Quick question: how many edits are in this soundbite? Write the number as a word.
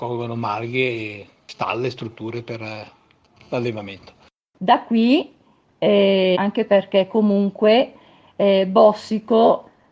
two